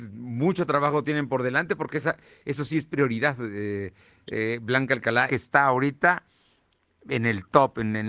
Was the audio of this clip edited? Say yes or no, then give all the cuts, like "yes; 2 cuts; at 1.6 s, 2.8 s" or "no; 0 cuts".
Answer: yes; 1 cut; at 5.3 s